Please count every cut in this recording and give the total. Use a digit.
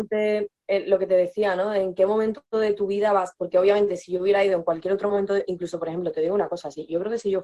0